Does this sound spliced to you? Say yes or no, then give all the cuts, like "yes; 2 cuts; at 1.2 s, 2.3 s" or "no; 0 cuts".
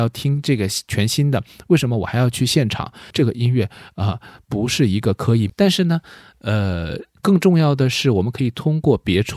yes; 3 cuts; at 3.1 s, 5.5 s, 7.2 s